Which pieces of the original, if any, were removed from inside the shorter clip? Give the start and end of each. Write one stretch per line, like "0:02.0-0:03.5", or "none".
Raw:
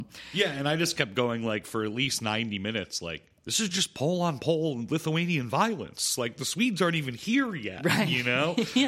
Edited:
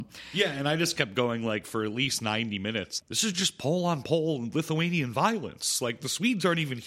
0:03.0-0:03.4